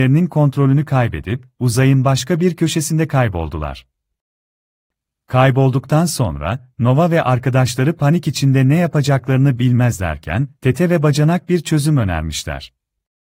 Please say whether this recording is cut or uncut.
uncut